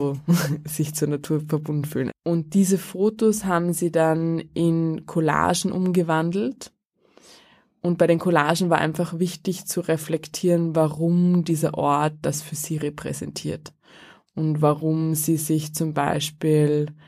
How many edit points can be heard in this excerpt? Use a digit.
1